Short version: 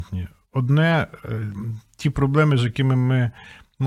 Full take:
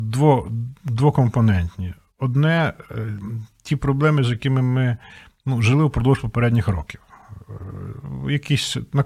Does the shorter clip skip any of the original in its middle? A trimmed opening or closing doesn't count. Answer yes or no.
no